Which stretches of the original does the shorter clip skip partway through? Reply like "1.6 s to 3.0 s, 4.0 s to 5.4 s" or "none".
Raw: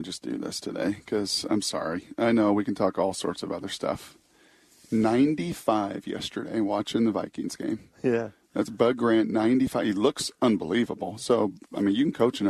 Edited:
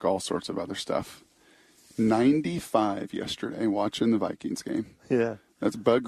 none